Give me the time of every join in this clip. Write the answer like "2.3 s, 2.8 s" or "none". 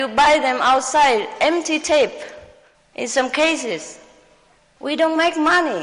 none